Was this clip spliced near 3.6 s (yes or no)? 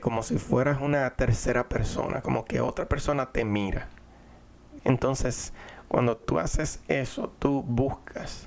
no